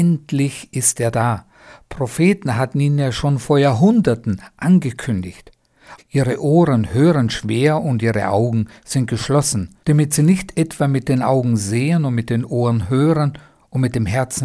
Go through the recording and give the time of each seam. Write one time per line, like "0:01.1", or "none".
0:06.0
0:09.8